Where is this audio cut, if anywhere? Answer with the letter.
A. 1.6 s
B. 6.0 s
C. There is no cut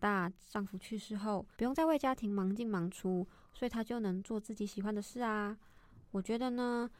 A